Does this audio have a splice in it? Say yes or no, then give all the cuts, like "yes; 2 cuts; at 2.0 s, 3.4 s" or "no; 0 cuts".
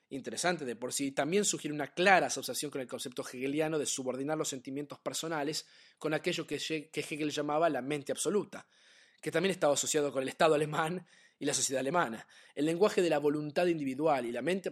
no; 0 cuts